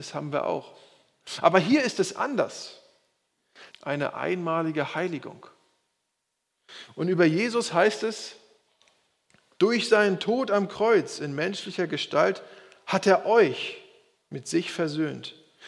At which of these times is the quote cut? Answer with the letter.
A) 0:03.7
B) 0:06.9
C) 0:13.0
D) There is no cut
A